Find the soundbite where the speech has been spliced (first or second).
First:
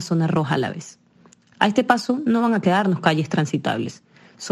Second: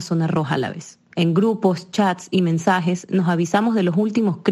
second